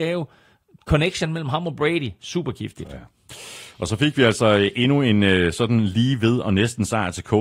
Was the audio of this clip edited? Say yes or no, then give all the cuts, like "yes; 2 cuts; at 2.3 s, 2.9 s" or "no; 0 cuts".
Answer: no; 0 cuts